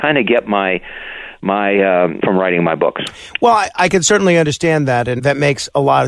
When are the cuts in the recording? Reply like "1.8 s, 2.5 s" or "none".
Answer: 2.2 s, 5.2 s